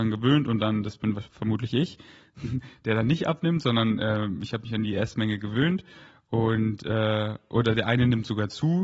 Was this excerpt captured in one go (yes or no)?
yes